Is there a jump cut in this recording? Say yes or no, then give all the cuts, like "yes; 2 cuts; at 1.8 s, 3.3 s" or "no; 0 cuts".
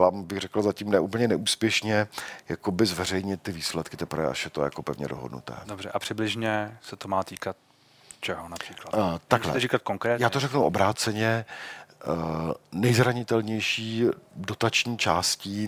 no; 0 cuts